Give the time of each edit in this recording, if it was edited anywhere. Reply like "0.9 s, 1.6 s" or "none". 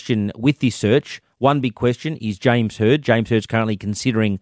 none